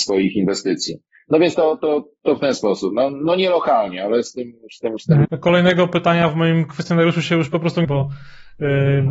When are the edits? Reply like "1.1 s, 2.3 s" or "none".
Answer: 5.2 s, 7.8 s